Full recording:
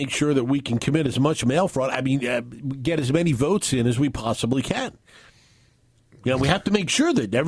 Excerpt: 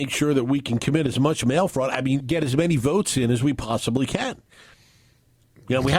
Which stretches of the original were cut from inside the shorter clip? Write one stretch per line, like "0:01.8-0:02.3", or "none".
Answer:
0:02.2-0:02.8